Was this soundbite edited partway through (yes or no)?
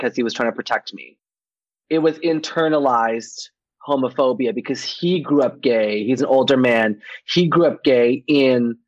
no